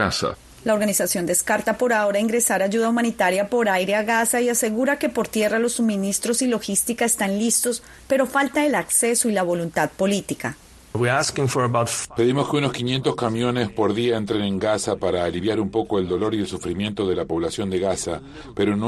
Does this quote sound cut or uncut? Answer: uncut